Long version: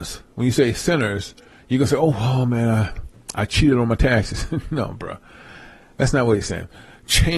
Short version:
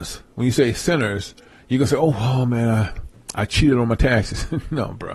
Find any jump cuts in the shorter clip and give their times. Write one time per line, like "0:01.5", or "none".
none